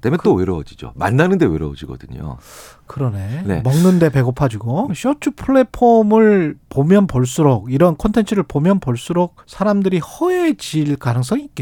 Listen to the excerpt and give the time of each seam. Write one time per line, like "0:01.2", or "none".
0:04.9
0:09.4